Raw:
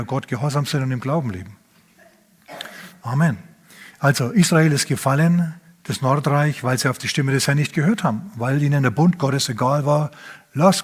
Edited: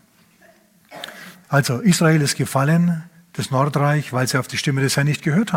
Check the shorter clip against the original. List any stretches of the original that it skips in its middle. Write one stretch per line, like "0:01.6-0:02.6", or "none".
0:03.0-0:03.9